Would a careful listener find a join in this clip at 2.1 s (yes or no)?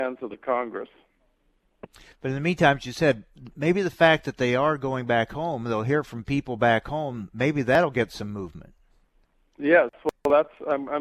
yes